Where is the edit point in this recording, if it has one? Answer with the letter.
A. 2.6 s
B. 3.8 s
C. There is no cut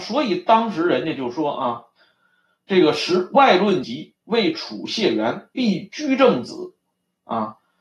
B